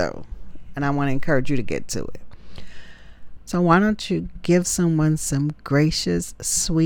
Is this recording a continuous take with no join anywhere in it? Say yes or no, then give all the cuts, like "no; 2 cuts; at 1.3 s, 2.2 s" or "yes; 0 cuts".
no; 1 cut; at 3.4 s